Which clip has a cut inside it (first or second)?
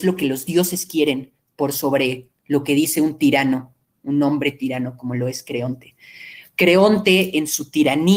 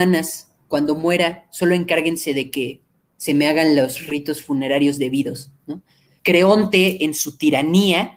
second